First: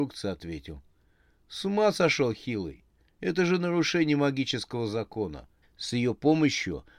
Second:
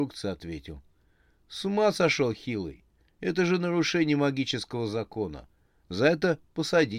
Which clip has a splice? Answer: first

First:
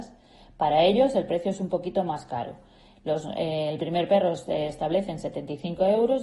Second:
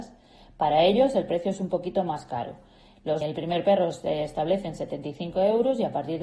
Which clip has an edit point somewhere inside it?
second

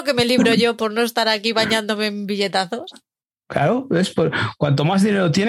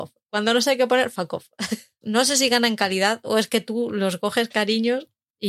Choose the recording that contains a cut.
second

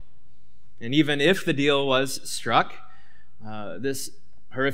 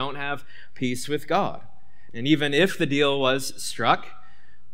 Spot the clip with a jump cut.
second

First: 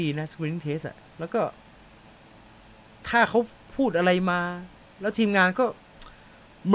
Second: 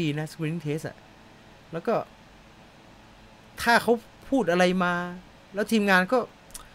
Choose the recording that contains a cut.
first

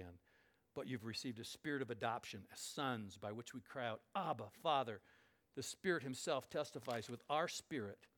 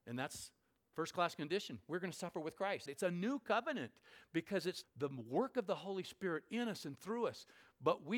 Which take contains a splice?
second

